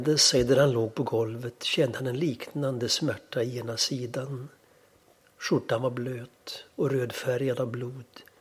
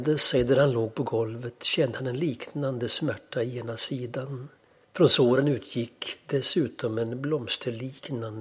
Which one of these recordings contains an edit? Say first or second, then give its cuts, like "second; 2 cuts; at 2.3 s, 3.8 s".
second; 1 cut; at 4.8 s